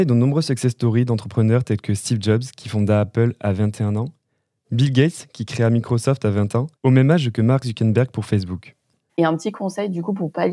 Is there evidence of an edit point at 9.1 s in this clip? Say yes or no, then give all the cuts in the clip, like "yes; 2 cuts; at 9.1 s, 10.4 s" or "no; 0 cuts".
yes; 2 cuts; at 6.8 s, 9.1 s